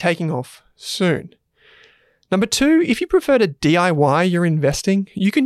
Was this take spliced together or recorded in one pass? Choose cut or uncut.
uncut